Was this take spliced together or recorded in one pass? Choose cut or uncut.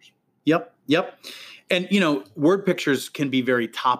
uncut